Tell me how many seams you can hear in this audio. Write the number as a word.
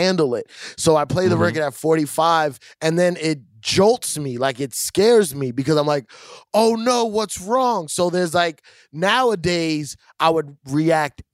zero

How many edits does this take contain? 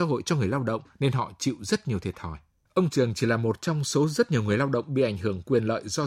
one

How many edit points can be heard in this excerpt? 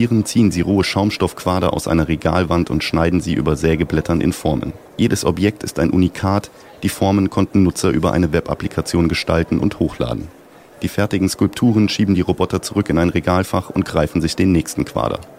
one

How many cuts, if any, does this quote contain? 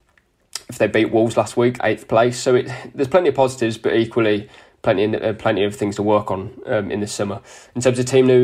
one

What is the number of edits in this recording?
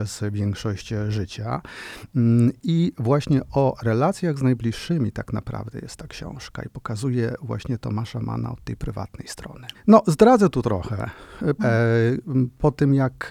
two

